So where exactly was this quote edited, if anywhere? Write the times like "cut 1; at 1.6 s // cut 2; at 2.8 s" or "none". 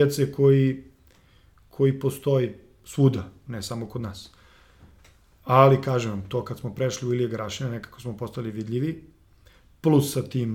none

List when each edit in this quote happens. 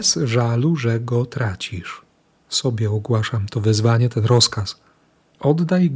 cut 1; at 2.4 s

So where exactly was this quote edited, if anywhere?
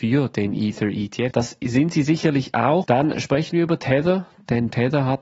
cut 1; at 1.3 s // cut 2; at 2.8 s

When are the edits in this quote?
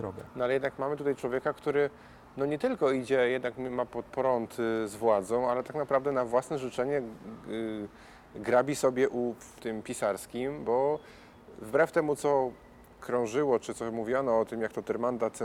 cut 1; at 9.6 s

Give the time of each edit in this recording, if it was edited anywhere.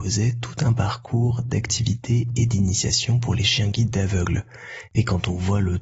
cut 1; at 4.9 s

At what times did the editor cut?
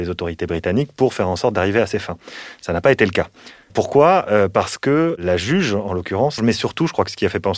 cut 1; at 3.7 s // cut 2; at 6.4 s

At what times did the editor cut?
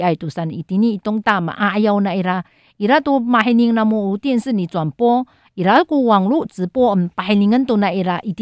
none

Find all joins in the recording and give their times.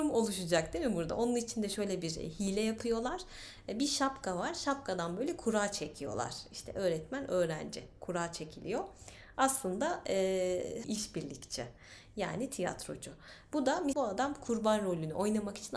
cut 1; at 10.8 s // cut 2; at 13.9 s

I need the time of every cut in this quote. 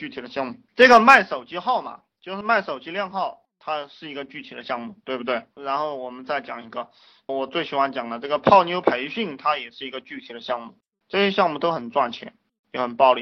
cut 1; at 11.0 s

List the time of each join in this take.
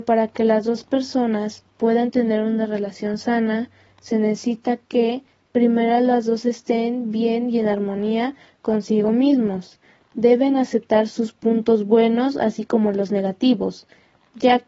none

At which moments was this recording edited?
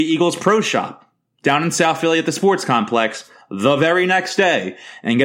none

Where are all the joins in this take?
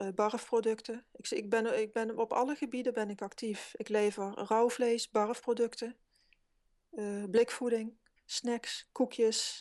cut 1; at 8.2 s

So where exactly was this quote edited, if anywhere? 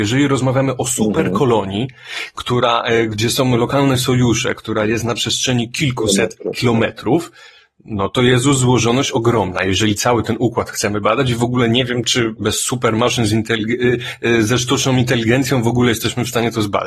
cut 1; at 12.4 s

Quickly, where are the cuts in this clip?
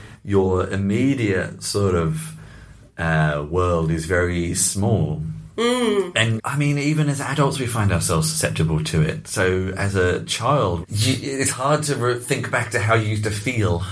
cut 1; at 6.4 s // cut 2; at 10.8 s

